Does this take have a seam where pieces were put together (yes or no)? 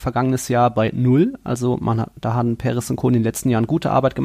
no